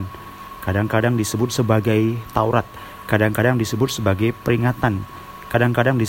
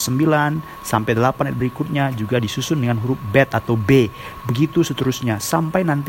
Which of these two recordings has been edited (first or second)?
first